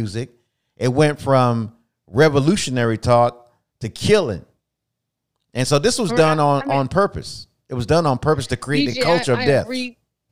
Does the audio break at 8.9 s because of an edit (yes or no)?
no